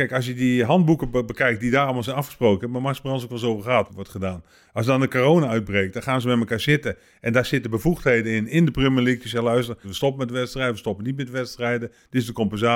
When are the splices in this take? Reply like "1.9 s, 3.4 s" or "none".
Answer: 3.9 s, 9.8 s